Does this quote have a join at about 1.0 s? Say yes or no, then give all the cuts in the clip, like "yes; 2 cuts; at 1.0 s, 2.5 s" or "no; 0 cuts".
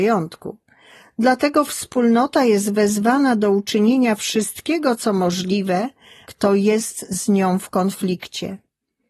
no; 1 cut; at 6.2 s